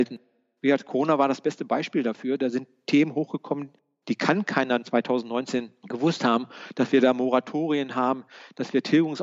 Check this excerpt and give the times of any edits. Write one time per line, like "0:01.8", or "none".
none